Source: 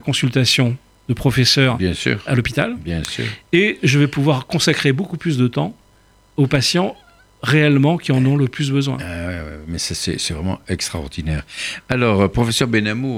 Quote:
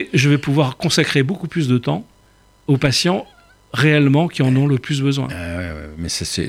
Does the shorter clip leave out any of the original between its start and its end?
no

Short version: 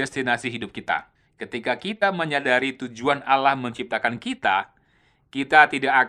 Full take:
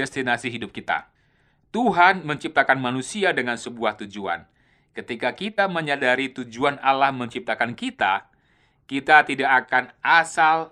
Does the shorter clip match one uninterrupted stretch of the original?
no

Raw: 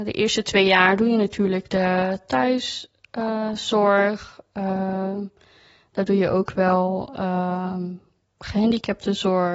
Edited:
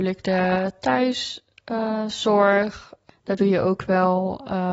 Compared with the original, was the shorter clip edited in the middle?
yes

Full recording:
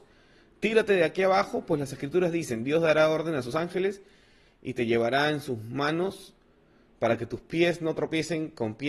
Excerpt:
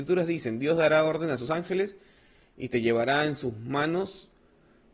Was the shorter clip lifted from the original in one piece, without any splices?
yes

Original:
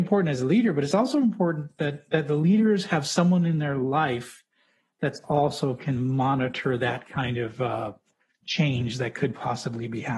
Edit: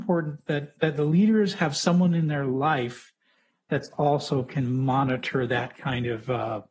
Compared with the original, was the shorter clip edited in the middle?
no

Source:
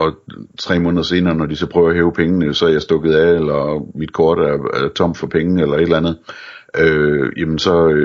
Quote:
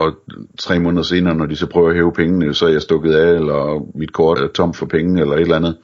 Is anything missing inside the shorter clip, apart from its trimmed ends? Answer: yes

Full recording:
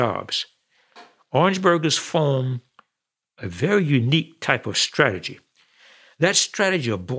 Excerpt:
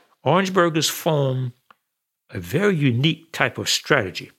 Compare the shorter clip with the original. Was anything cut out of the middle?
no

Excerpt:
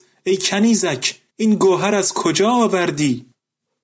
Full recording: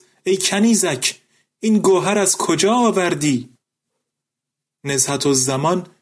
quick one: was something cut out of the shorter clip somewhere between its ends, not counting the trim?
yes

